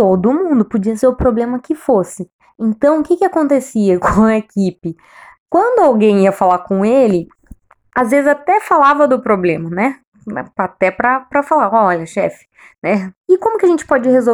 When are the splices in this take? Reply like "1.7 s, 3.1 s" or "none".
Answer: 13.2 s